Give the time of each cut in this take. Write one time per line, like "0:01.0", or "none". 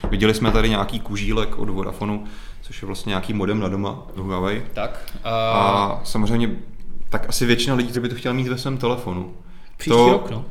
0:04.2
0:07.9

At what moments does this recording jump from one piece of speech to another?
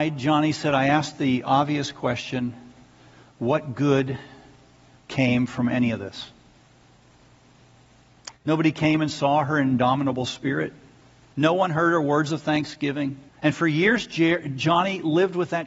0:08.3
0:11.3
0:13.3

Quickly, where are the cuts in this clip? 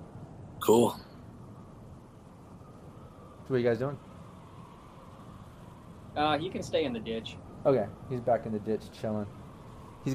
0:03.5
0:06.1

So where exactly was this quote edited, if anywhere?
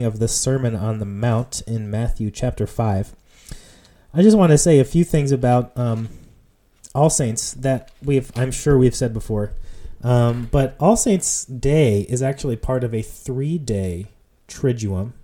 none

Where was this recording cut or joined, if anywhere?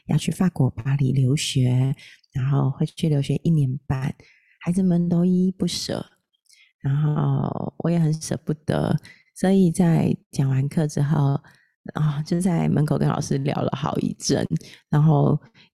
none

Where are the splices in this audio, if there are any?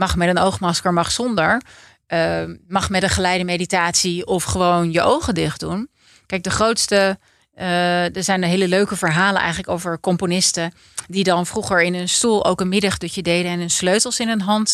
none

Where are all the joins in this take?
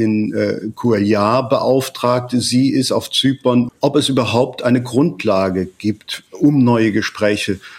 0:03.7

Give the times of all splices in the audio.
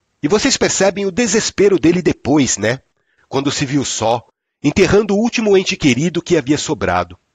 none

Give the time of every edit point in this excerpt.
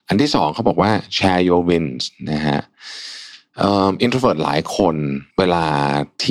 0:05.3

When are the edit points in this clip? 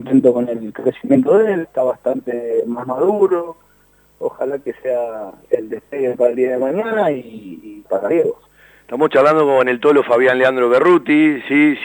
0:01.6
0:07.8

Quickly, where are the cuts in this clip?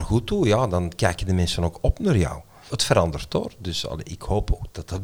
0:02.7

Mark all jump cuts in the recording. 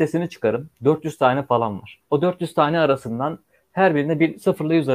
0:02.0

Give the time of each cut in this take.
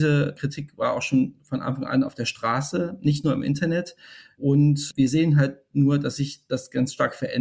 none

